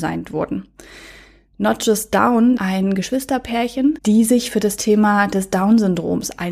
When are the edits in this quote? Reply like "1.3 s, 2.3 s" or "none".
2.6 s, 4.0 s